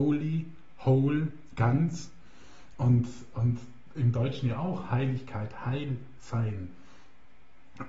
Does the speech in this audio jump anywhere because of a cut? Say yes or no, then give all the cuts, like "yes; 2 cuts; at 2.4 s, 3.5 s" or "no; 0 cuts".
no; 0 cuts